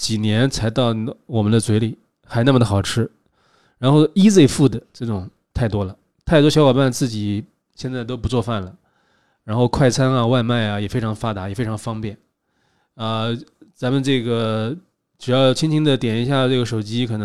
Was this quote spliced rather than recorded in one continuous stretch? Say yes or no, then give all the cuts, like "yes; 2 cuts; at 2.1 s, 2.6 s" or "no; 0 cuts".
no; 0 cuts